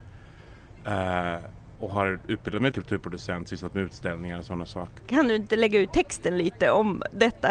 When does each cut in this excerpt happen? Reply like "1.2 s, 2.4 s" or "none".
2.7 s, 5.0 s